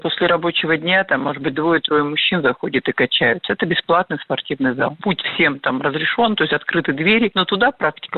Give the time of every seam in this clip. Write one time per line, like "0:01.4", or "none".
none